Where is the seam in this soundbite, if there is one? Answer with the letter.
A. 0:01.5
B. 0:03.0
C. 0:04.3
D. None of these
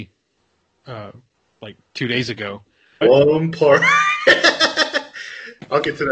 B